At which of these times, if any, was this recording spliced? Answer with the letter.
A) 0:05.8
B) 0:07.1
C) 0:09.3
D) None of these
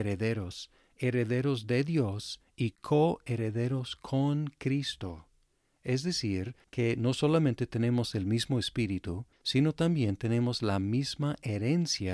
C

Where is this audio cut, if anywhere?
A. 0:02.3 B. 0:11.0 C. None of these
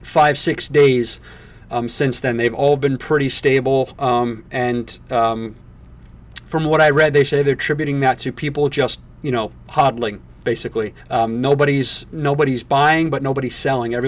B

